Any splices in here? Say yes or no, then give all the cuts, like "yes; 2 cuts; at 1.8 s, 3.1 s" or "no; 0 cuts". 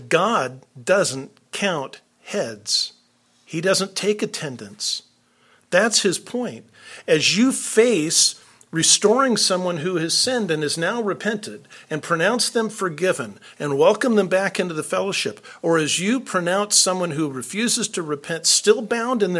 no; 0 cuts